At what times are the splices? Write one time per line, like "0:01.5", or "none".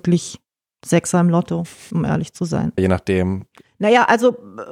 0:02.8